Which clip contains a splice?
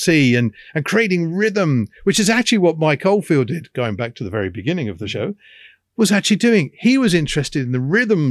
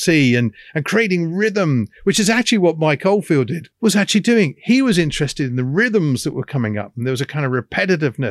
second; 1 cut; at 3.7 s

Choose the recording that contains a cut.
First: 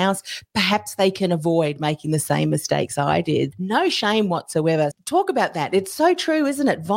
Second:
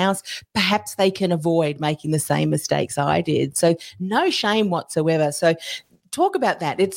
first; 2 cuts; at 3.5 s, 4.9 s

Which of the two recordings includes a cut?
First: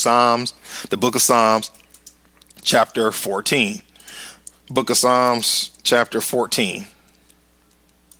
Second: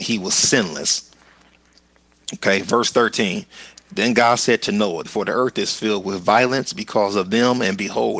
second; 1 cut; at 5.1 s

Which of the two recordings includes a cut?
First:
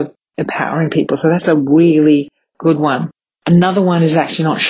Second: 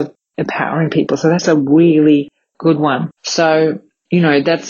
second; 1 cut; at 3.2 s

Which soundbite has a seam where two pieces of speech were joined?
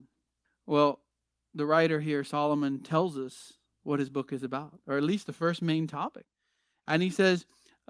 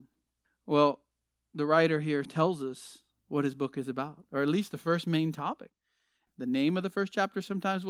second; 2 cuts; at 2.2 s, 6.3 s

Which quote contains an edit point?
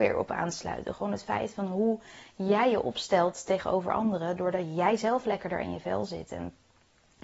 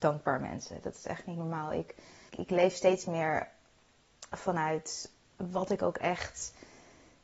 second; 1 cut; at 2.3 s

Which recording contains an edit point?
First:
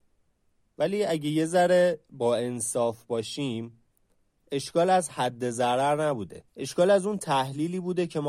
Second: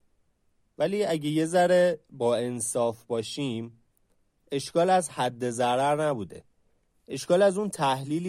first; 1 cut; at 6.5 s

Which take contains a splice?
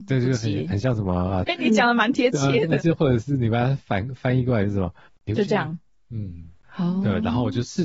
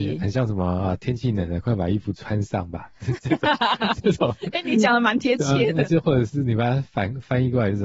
first; 2 cuts; at 1.5 s, 5.1 s

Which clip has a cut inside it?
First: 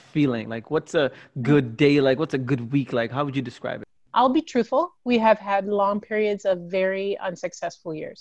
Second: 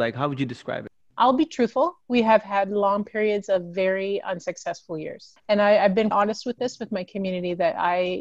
second; 1 cut; at 6.1 s

